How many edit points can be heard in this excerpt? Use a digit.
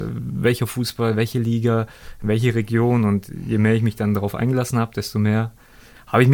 0